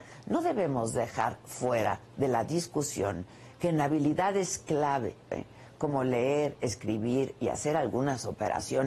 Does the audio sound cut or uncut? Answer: cut